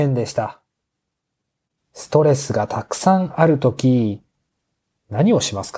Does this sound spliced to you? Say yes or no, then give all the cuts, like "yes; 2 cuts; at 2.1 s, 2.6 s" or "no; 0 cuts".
yes; 1 cut; at 1.7 s